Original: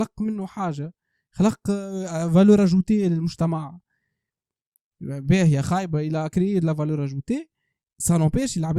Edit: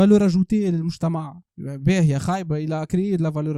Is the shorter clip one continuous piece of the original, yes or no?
no